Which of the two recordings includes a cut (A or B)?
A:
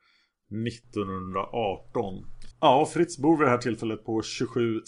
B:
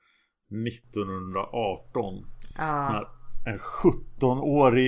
A